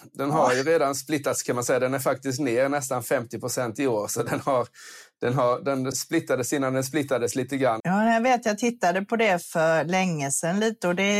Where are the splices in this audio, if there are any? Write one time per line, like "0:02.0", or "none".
0:05.9
0:07.8